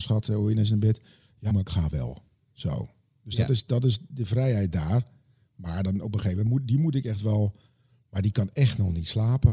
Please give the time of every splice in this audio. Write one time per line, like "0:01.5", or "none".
0:01.5